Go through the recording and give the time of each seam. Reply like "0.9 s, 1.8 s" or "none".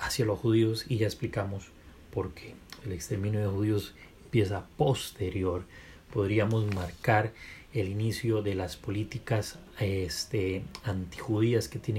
2.8 s